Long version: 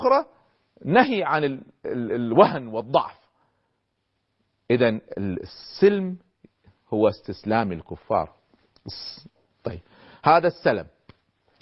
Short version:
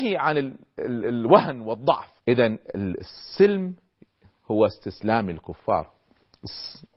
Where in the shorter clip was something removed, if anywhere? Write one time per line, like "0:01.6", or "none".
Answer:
0:02.2